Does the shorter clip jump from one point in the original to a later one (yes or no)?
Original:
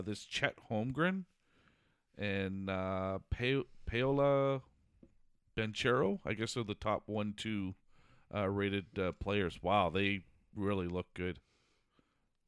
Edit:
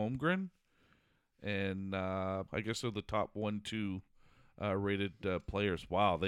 yes